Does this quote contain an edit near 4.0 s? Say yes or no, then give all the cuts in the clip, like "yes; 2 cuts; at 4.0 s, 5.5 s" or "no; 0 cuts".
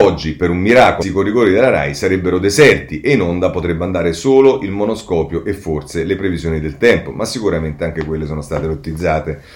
no; 1 cut; at 1.0 s